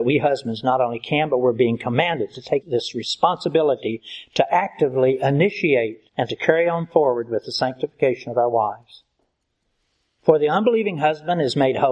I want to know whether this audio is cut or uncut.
cut